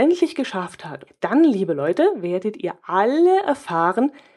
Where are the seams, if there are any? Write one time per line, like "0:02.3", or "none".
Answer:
0:01.1